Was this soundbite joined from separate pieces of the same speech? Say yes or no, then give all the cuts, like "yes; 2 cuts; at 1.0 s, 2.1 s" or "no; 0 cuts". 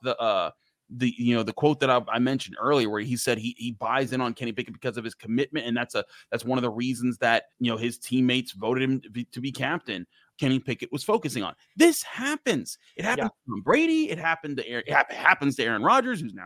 yes; 2 cuts; at 7.5 s, 10.3 s